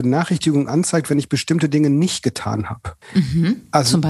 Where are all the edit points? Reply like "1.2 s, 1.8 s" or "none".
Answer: 3.0 s